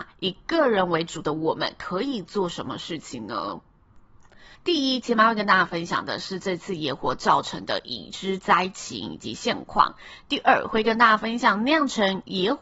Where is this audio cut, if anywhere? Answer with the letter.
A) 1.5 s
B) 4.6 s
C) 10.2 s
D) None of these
B